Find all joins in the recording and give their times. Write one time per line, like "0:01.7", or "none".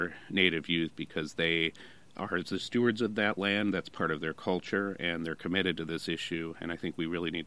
none